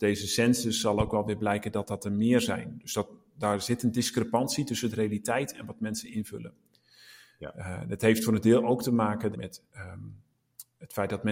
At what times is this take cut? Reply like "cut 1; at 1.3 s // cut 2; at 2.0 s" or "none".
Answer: cut 1; at 9.3 s